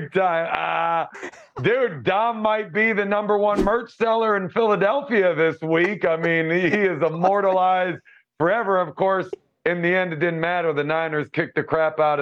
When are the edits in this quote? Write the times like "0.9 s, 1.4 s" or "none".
none